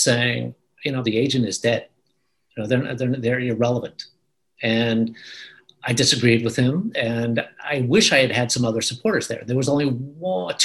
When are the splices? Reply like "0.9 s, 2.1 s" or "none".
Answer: 1.0 s